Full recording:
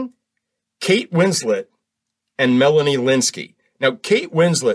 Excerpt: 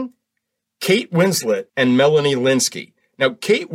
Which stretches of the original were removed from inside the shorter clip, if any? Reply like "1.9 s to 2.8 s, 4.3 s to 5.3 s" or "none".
1.7 s to 2.3 s